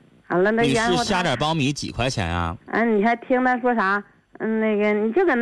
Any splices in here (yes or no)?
no